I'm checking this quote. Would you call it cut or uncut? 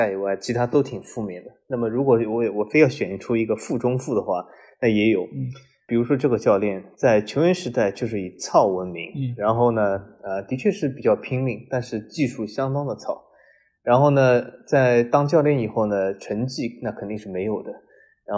uncut